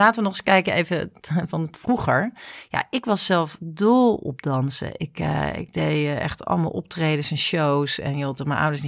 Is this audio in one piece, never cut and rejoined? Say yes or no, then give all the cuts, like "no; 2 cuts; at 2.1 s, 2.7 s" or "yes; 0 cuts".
yes; 0 cuts